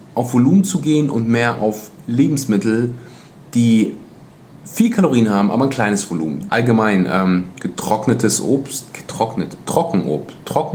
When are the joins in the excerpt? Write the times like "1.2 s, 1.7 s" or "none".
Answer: 6.5 s